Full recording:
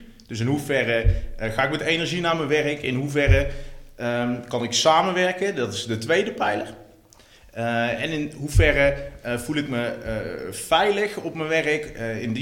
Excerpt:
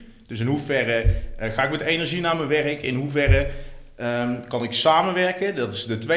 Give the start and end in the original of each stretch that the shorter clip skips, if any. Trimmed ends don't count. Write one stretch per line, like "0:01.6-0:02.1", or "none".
none